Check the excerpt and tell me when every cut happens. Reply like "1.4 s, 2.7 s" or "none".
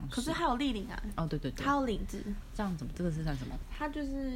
none